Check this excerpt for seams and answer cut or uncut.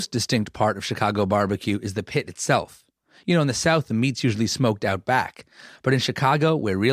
uncut